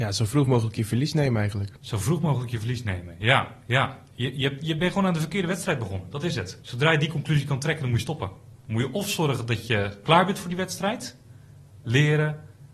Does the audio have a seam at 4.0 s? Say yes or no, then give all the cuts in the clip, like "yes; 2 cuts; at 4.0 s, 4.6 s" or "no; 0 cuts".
no; 1 cut; at 11.8 s